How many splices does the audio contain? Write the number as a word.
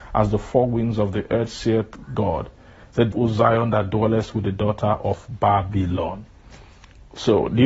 one